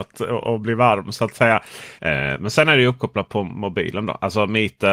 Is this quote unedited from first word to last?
no; 1 cut; at 2.0 s

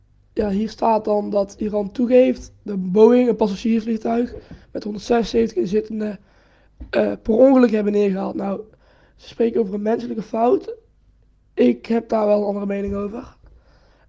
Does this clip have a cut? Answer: no; 0 cuts

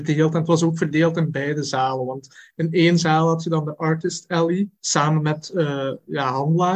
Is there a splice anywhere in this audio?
yes; 1 cut; at 4.8 s

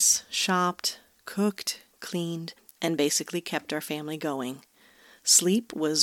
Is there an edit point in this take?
no; 0 cuts

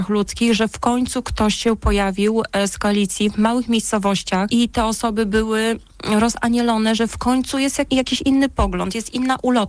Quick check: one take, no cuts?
no; 1 cut; at 7.9 s

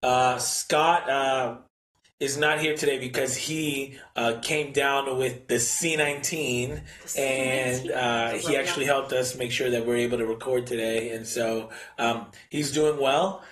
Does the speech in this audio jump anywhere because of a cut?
no; 0 cuts

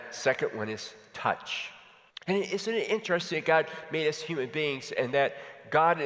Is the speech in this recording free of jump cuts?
no; 1 cut; at 2.1 s

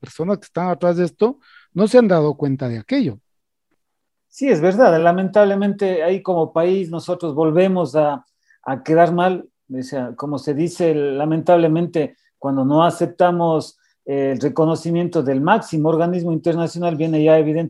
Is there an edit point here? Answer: no; 0 cuts

